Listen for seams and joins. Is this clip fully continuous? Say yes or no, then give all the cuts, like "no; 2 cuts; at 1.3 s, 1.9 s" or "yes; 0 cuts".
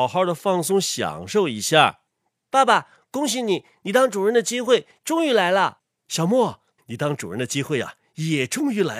no; 1 cut; at 6.8 s